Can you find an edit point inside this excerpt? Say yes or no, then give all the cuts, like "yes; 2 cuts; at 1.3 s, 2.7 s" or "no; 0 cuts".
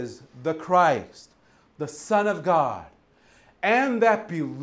no; 0 cuts